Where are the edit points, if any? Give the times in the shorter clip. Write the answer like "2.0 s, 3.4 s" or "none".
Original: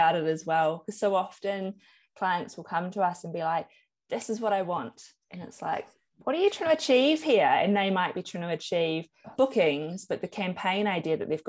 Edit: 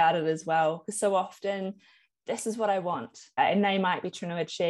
2.1 s, 3.4 s